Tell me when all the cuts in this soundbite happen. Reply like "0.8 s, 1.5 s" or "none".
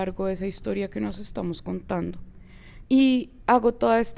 2.8 s